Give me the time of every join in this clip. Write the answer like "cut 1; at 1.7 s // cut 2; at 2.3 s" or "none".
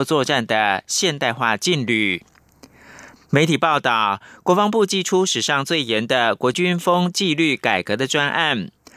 cut 1; at 3.2 s // cut 2; at 6.5 s